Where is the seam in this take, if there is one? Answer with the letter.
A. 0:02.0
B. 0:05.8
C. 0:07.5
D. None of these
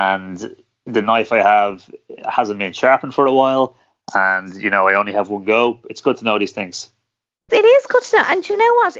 C